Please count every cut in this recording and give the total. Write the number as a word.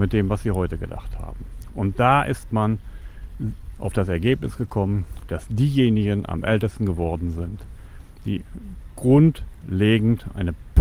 one